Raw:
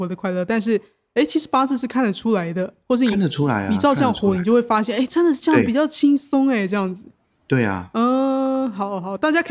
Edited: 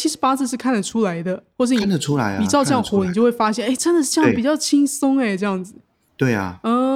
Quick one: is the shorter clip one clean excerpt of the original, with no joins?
yes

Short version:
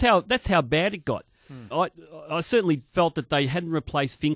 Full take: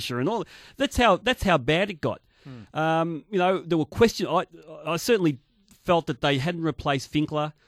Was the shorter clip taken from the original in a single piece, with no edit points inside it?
no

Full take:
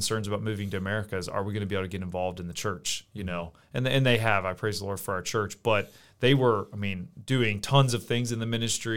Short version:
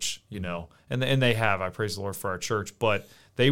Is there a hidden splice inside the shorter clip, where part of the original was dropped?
no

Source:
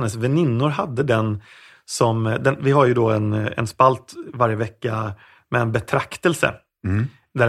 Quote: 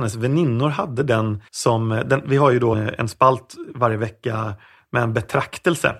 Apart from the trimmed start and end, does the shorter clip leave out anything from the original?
yes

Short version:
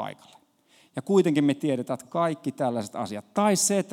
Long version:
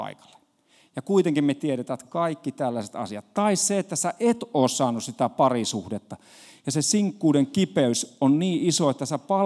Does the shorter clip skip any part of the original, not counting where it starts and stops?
no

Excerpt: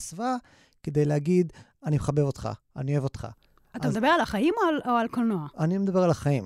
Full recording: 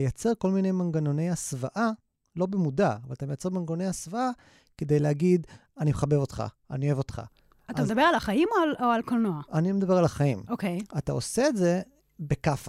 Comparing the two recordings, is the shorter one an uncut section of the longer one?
yes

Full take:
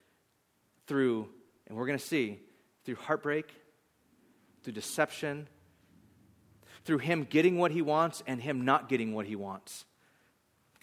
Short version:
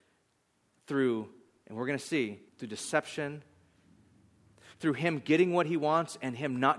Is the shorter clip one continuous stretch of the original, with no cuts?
no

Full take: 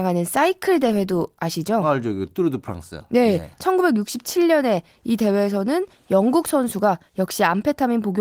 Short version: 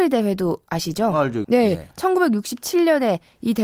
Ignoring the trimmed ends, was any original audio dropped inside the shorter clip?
yes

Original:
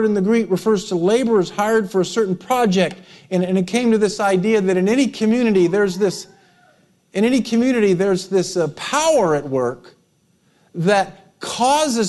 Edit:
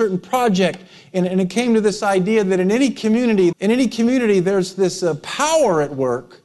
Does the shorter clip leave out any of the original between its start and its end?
yes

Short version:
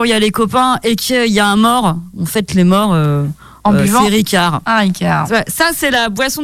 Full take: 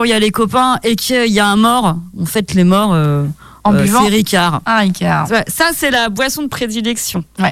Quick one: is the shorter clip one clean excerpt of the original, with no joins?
yes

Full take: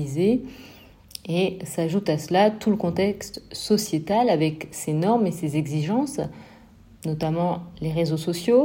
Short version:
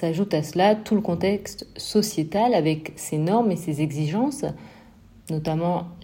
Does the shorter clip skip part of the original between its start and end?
no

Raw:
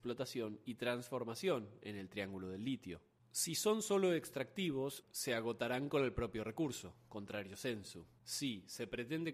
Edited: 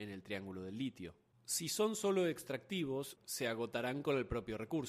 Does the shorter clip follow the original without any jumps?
yes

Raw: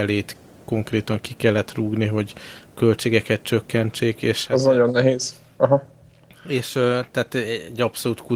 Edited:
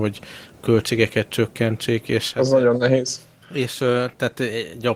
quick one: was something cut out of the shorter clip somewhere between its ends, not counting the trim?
yes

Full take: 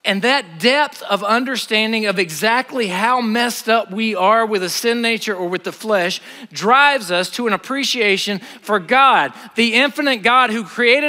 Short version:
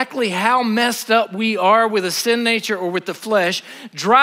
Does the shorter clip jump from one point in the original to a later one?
no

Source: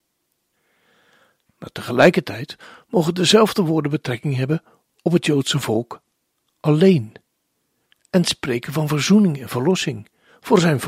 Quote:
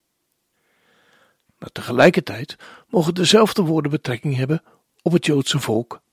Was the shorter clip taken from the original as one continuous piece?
yes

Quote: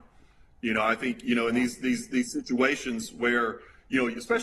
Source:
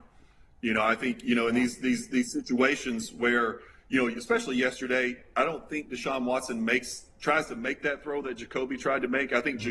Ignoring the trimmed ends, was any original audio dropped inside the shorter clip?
no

